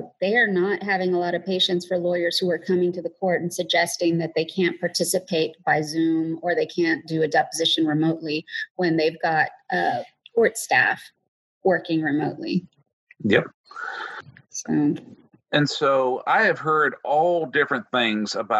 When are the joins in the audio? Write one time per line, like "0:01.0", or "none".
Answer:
none